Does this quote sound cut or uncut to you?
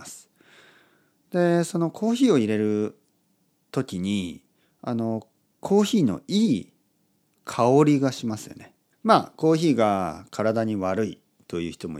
cut